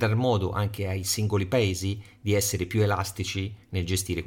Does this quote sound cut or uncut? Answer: uncut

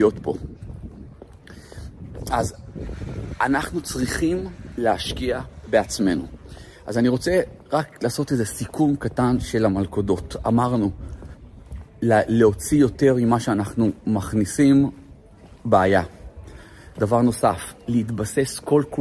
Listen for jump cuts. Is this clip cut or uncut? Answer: uncut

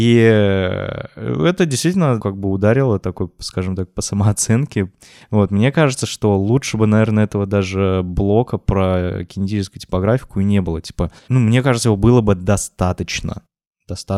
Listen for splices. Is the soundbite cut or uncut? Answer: cut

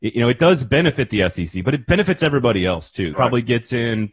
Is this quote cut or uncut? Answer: cut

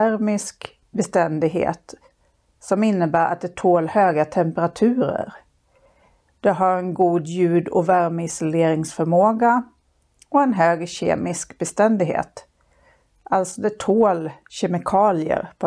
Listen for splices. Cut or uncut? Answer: uncut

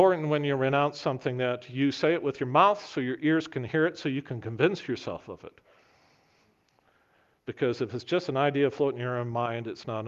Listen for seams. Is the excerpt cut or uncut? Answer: uncut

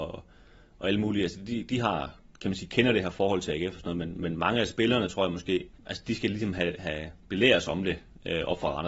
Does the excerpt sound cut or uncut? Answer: cut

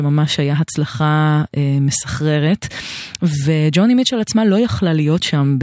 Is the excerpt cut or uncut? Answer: uncut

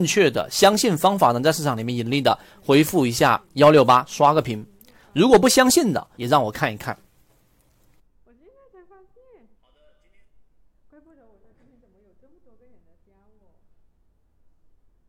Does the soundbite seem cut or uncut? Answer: cut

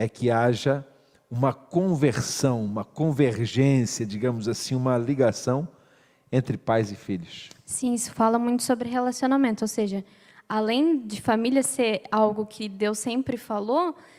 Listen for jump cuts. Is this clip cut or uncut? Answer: uncut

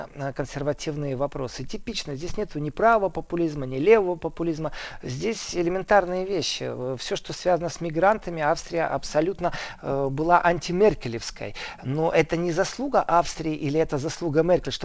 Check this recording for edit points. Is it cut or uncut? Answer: uncut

